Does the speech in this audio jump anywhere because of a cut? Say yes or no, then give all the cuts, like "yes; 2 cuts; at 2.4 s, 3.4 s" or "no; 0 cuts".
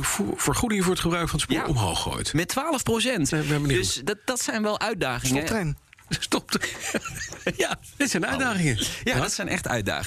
yes; 1 cut; at 3.3 s